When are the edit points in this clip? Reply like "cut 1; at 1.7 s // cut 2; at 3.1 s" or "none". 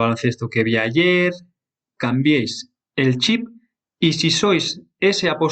cut 1; at 2.0 s